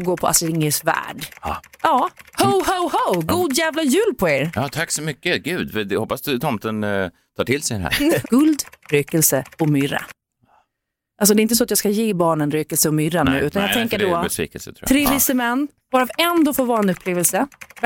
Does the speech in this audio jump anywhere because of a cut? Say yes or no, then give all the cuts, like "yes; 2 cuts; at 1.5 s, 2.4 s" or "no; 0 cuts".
yes; 2 cuts; at 8.2 s, 15.9 s